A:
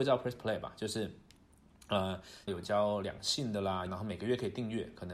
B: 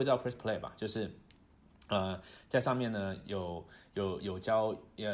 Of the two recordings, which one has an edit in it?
A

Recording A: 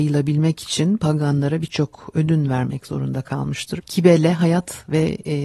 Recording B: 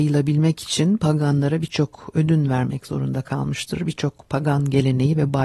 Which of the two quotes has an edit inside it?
A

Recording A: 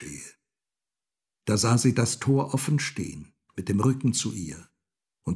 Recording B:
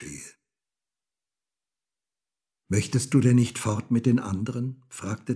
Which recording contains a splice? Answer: A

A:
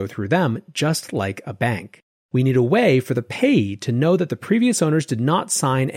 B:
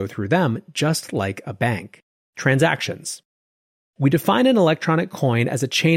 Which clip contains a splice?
B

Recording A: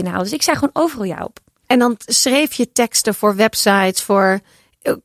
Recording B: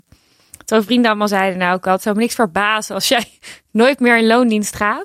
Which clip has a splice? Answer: A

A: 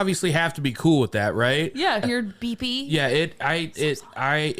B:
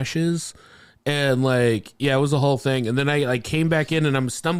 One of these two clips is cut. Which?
A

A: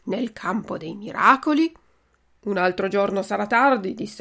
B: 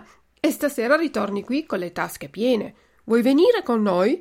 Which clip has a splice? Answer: A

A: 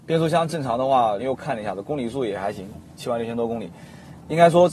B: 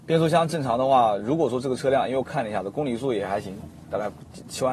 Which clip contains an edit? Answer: A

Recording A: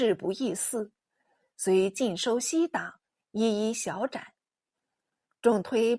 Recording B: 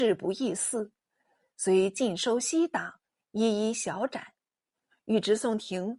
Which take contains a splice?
B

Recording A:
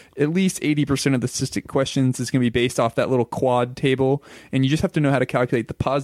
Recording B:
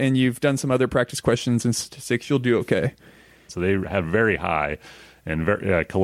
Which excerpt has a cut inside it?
B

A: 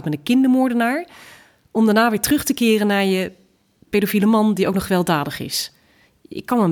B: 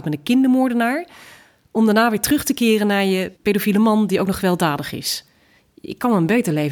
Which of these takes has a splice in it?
B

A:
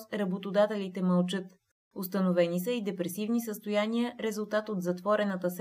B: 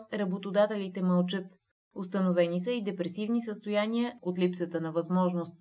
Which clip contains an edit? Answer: B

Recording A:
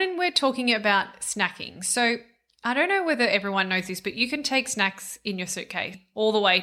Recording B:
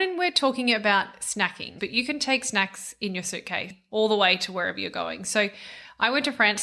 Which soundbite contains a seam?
B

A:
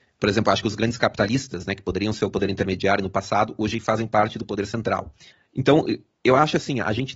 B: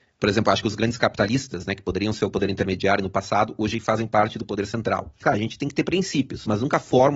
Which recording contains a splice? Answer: B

